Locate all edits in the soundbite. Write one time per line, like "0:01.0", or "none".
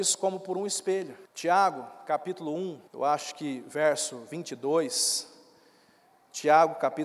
0:01.2
0:02.9